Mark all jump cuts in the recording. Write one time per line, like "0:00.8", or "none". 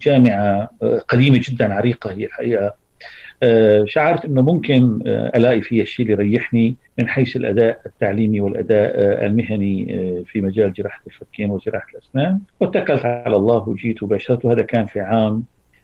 0:06.9
0:12.5